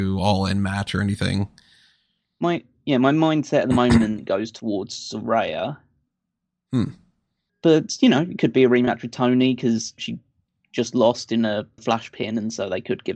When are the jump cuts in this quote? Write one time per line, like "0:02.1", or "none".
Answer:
0:07.5
0:10.0
0:11.8